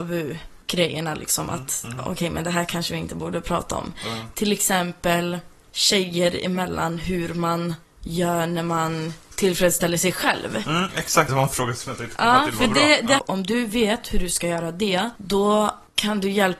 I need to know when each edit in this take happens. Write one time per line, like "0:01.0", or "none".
0:11.3
0:13.2